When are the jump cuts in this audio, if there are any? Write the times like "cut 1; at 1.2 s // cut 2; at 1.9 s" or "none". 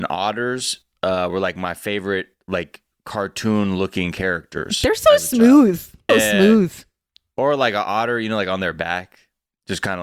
cut 1; at 6.1 s